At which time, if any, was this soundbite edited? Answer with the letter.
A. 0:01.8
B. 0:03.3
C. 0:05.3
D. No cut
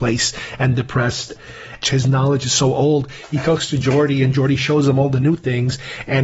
A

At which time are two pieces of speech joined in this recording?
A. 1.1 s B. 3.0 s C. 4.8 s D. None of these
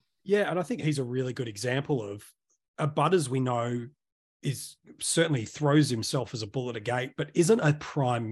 D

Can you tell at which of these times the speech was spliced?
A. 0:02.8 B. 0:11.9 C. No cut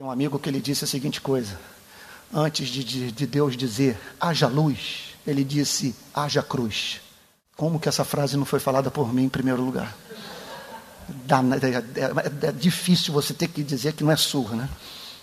C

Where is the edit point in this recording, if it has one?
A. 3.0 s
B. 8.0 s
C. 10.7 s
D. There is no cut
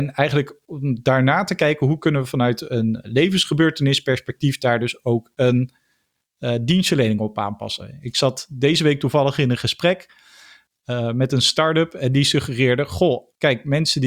A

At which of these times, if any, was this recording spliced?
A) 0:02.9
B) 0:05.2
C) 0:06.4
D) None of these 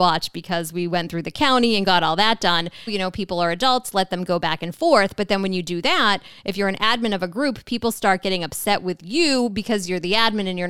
A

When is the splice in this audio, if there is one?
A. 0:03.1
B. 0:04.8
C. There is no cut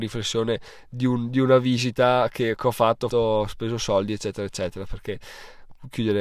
A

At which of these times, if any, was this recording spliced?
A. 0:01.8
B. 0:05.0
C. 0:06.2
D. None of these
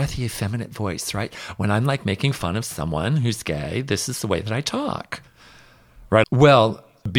C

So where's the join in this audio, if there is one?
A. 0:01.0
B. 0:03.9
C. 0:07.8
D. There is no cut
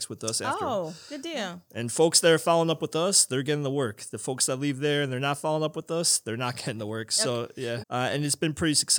C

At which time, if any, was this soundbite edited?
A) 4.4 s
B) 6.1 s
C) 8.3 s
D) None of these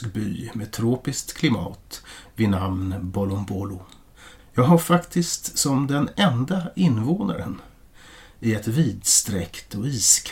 A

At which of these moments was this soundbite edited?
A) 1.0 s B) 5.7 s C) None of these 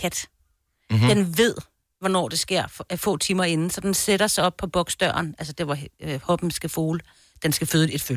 C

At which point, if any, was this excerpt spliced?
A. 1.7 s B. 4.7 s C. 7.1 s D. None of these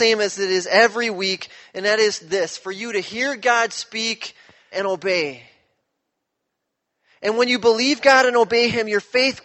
B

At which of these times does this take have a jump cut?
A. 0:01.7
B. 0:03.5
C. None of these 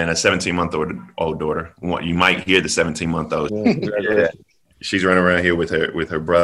B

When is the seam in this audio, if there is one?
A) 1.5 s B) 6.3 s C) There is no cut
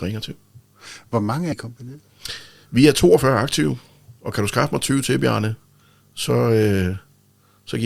A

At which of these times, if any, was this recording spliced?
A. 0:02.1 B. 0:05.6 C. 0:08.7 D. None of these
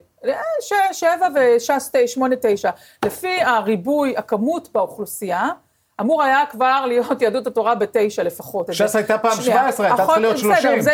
C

